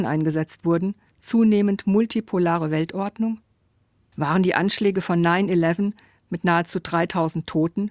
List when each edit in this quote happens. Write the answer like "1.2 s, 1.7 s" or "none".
1.1 s, 4.1 s